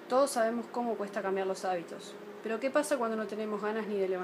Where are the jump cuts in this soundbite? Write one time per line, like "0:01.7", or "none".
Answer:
0:02.4